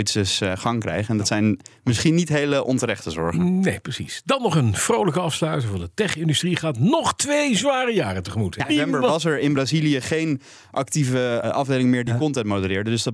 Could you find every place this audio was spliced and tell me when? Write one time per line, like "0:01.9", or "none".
0:08.7
0:11.4

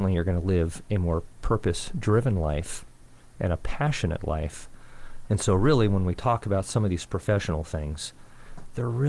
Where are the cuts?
0:05.3

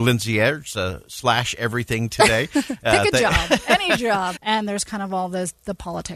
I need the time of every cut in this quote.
0:04.3

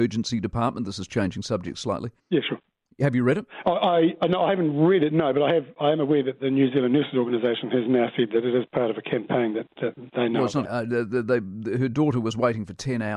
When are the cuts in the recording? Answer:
0:02.2
0:10.7

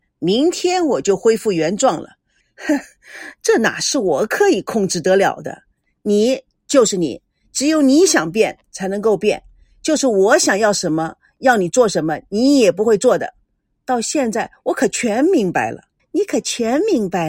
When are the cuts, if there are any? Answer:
0:02.4
0:16.0

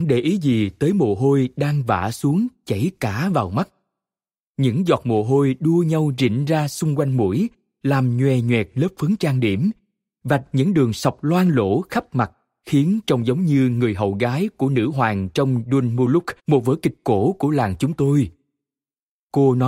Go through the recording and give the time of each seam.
0:16.4

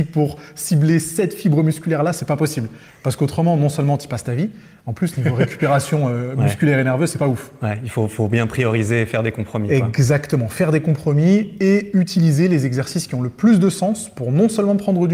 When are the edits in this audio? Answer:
none

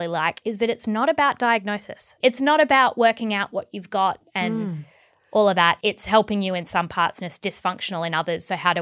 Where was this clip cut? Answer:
0:02.2

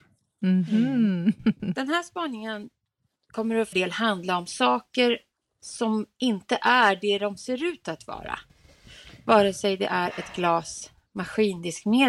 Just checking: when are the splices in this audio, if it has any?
0:03.7

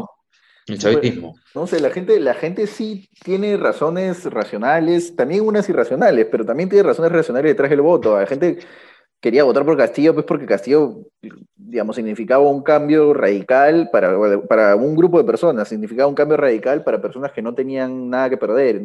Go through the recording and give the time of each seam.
0:01.5

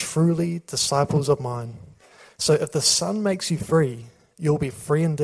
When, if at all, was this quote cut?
0:02.3

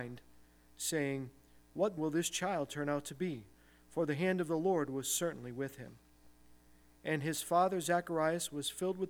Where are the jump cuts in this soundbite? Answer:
0:02.0

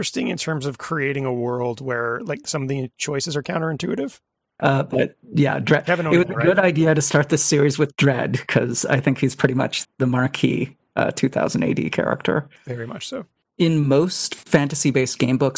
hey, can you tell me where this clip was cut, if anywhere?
0:04.6
0:09.8

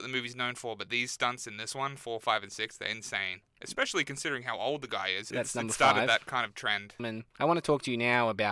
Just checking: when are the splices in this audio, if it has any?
0:05.3
0:07.0

